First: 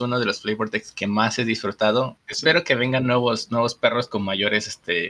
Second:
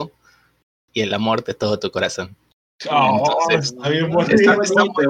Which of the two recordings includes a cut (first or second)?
first